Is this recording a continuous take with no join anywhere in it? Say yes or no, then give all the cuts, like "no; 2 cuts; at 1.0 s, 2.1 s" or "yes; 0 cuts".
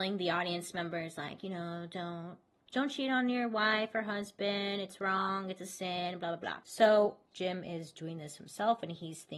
no; 1 cut; at 7.3 s